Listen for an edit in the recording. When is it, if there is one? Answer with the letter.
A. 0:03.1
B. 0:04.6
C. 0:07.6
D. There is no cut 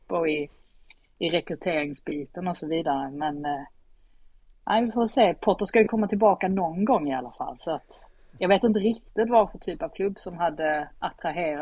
D